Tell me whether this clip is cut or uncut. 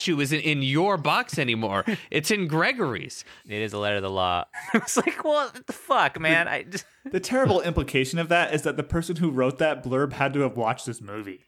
cut